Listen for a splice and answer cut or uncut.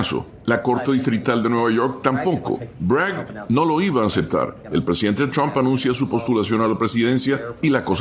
cut